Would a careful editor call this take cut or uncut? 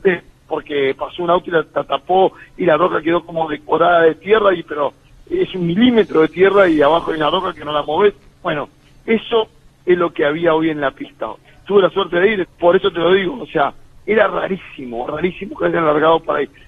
cut